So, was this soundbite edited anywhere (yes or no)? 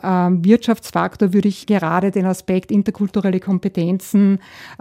yes